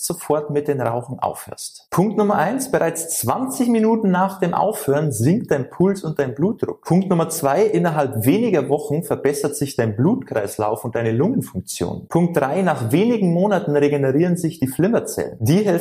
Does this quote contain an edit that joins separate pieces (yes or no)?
no